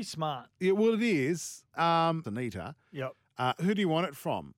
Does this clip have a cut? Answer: yes; 2 cuts; at 2.2 s, 3.5 s

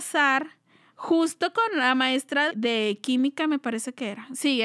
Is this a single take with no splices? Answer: no; 1 cut; at 2.5 s

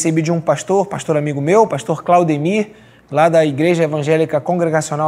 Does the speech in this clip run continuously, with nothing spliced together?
yes; 0 cuts

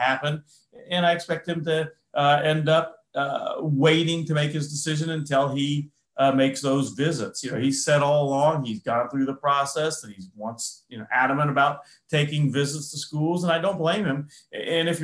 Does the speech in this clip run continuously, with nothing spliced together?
yes; 0 cuts

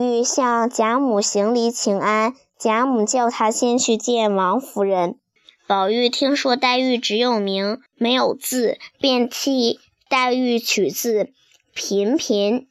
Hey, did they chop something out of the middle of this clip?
yes; 2 cuts; at 5.4 s, 7.9 s

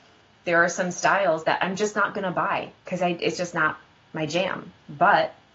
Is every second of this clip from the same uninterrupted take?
yes; 0 cuts

